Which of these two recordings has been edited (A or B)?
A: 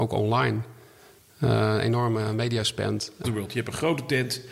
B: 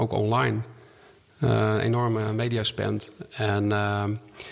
A